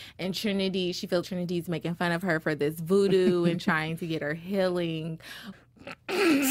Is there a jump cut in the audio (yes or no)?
yes